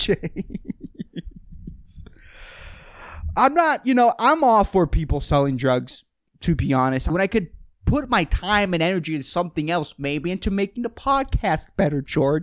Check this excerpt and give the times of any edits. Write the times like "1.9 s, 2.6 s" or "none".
7.1 s

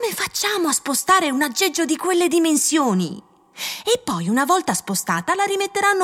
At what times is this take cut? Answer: none

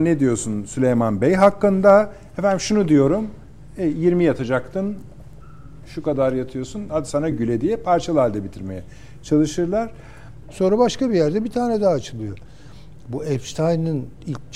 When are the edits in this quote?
7.3 s, 10.4 s

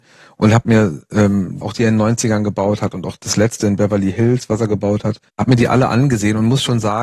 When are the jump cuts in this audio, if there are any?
1.6 s

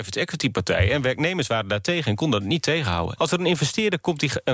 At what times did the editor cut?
3.2 s

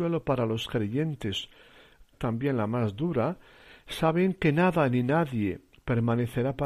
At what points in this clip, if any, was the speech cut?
2.1 s

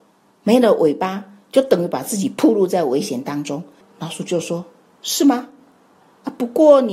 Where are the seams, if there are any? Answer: 3.8 s

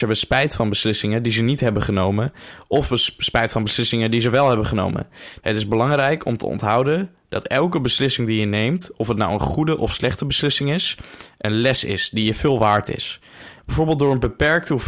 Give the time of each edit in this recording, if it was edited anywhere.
5.4 s, 13.6 s

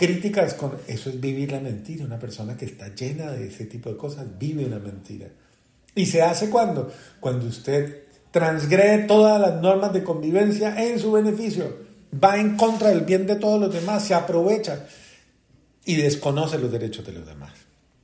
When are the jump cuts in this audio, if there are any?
none

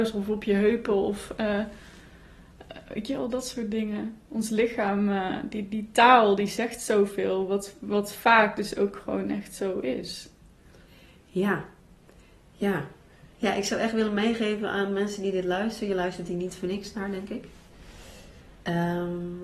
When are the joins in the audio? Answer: none

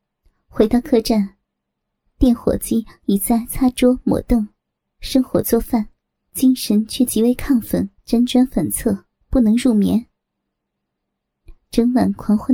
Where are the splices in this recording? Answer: 6.3 s, 8.0 s

